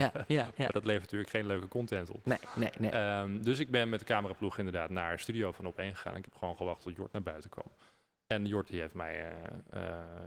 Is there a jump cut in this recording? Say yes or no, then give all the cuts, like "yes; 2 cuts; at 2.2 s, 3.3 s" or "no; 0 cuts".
no; 0 cuts